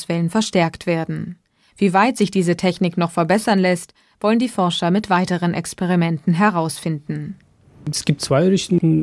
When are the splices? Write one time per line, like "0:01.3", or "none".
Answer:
none